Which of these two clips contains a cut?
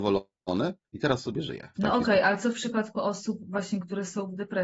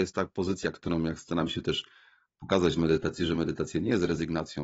first; 1 cut; at 1.7 s

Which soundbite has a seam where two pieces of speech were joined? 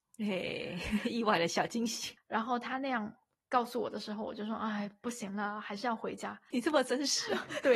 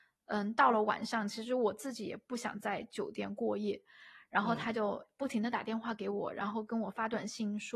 first; 2 cuts; at 2.2 s, 6.5 s

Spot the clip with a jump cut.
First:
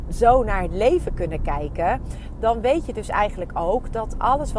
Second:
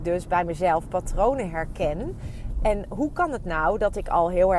second; 1 cut; at 2.6 s

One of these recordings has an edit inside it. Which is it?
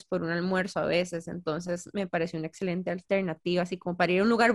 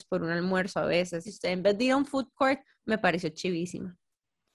second; 2 cuts; at 1.2 s, 2.6 s

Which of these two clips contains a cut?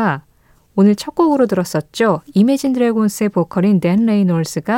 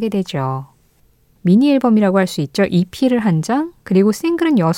second; 1 cut; at 1.4 s

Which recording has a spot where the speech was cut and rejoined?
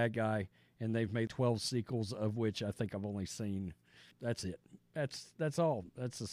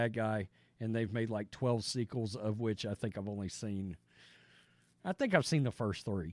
first; 2 cuts; at 1.3 s, 4.1 s

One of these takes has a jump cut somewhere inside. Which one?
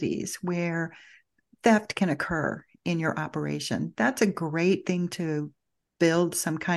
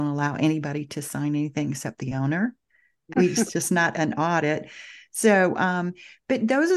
second; 1 cut; at 3.1 s

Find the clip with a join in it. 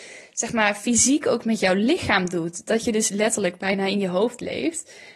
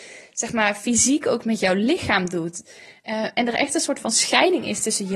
second; 1 cut; at 2.6 s

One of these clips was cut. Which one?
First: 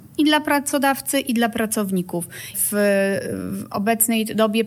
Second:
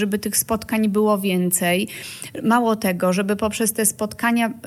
first; 1 cut; at 2.5 s

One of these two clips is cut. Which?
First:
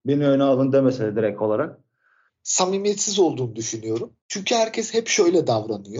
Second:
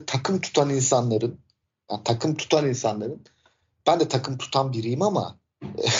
first; 2 cuts; at 2.3 s, 4.2 s

